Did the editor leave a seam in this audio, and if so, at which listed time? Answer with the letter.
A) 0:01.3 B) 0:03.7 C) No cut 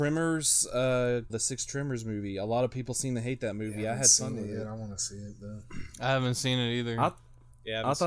A